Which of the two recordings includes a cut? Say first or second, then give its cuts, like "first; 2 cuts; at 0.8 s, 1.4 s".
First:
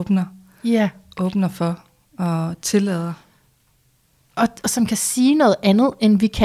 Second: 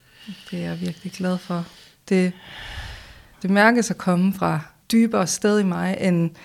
second; 2 cuts; at 3.3 s, 4.8 s